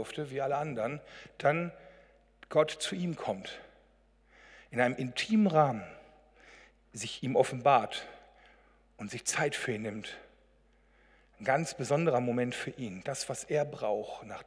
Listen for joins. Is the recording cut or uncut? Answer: uncut